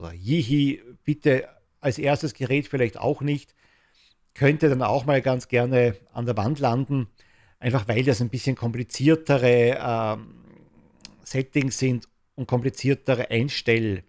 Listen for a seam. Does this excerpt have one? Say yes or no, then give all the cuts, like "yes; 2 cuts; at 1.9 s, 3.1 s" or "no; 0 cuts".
no; 0 cuts